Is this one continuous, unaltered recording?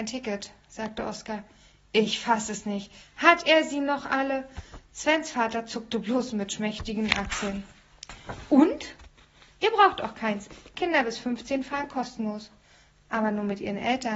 yes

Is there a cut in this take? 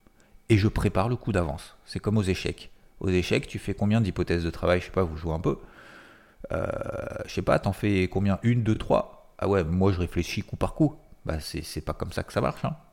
no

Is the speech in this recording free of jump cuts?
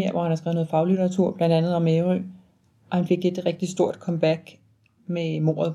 yes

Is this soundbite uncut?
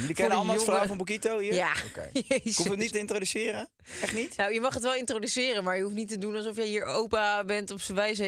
no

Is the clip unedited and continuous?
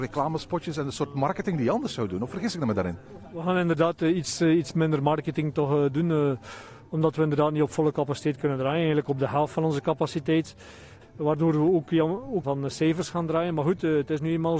no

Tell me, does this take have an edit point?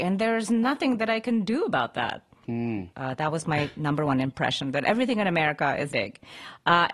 yes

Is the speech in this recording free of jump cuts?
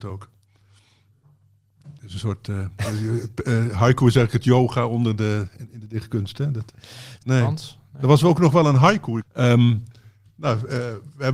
no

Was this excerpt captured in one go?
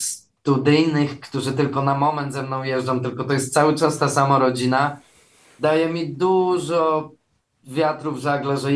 yes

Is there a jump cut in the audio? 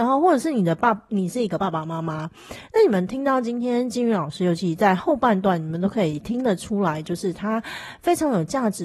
no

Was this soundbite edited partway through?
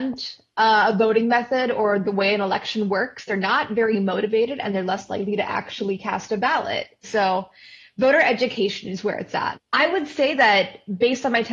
yes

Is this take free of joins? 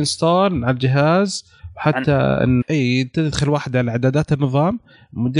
no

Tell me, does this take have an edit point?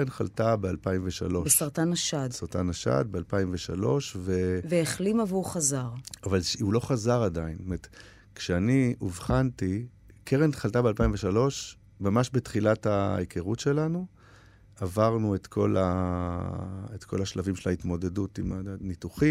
no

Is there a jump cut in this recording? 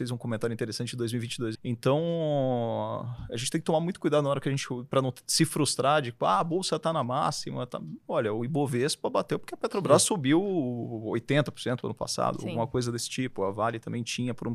yes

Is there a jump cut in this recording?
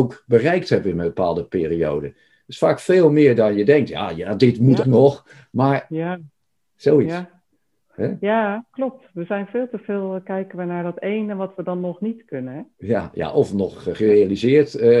yes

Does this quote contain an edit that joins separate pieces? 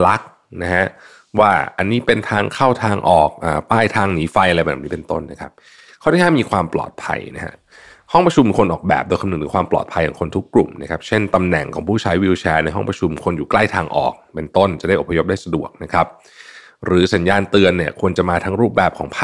no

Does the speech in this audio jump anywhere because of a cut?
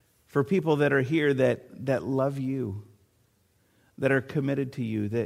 no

